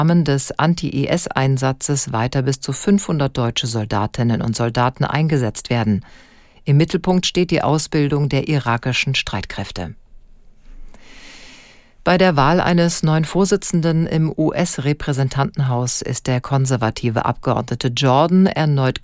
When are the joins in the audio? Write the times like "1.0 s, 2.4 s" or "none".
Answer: none

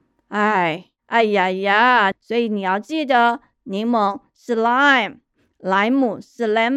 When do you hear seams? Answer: 2.1 s

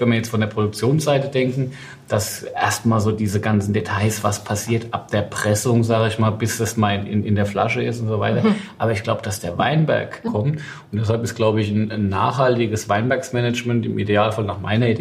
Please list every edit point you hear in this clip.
10.3 s

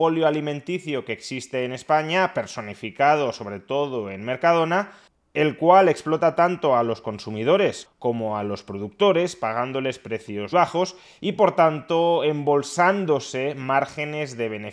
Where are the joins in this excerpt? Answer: 7.8 s, 10.5 s

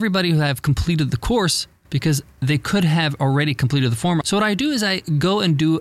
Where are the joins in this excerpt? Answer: 4.2 s

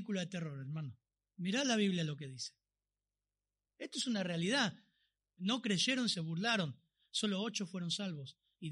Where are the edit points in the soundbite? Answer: 3.6 s, 5.4 s

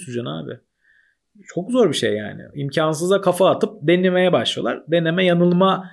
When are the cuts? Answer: none

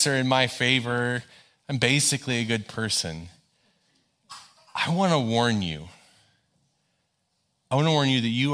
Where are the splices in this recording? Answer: none

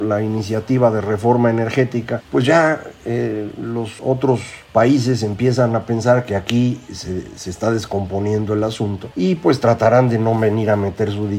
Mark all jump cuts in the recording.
4.0 s

